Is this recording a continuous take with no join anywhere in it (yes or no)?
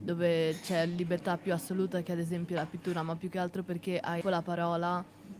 no